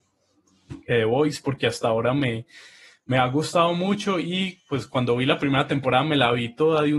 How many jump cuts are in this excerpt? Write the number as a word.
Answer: zero